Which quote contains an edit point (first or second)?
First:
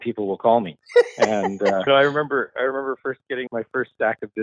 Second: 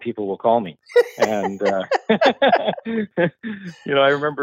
first